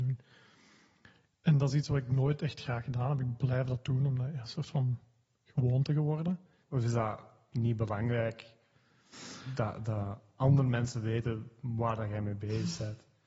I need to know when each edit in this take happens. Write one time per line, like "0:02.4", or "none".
0:04.4
0:06.6